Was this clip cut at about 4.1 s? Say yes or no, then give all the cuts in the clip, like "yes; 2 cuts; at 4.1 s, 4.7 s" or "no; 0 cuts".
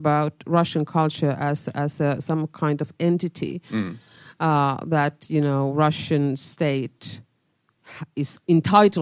no; 0 cuts